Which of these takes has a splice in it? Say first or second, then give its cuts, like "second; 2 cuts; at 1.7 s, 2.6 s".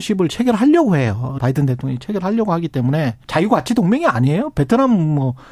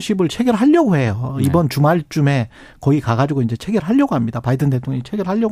first; 2 cuts; at 1.4 s, 3.2 s